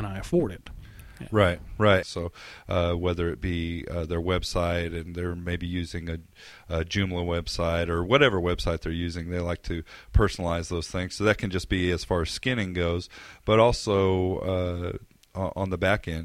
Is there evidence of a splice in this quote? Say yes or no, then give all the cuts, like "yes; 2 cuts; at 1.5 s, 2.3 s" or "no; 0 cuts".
yes; 1 cut; at 2.0 s